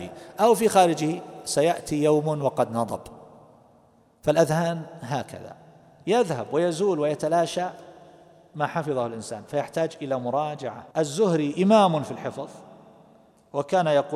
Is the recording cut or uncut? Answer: cut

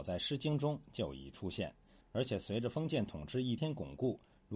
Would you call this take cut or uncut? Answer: cut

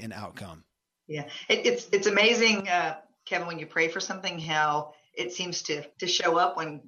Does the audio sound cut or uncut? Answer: cut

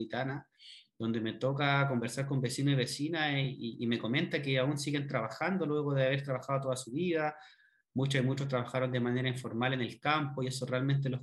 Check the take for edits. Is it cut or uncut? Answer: uncut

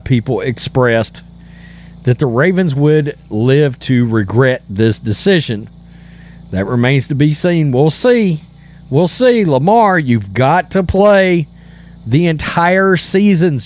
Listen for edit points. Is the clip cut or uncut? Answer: uncut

